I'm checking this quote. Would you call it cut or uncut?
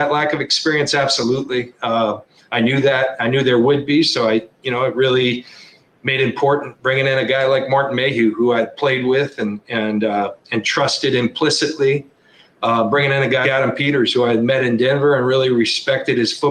cut